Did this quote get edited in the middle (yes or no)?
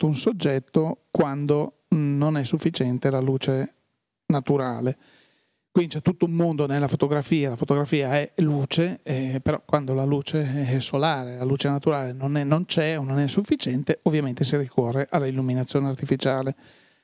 no